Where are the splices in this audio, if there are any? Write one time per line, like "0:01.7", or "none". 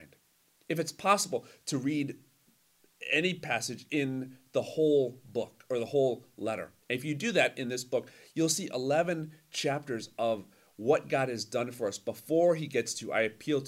0:06.8